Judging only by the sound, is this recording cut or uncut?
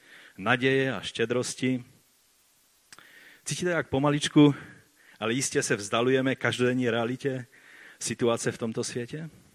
uncut